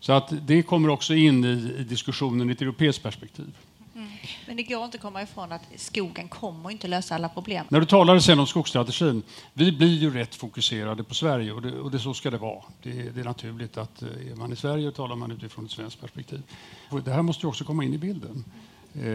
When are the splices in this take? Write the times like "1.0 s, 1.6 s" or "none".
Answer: 7.7 s, 16.9 s